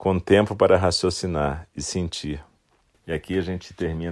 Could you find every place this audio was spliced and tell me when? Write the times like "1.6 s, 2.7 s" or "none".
2.9 s